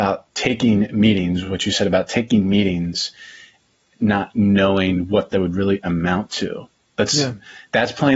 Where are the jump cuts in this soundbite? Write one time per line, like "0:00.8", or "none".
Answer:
none